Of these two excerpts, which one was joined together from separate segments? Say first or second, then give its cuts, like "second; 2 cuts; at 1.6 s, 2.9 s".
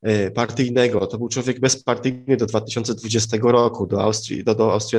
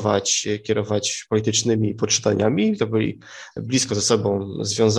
second; 1 cut; at 2.8 s